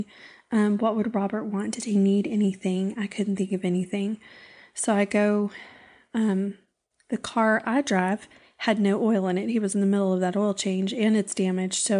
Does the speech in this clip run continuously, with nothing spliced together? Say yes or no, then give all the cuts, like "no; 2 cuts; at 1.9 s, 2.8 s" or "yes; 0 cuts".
yes; 0 cuts